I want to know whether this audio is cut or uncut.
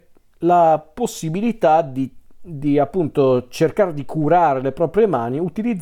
uncut